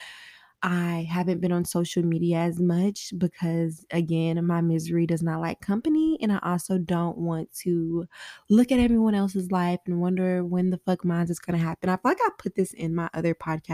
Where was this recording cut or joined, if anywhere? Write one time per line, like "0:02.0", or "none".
none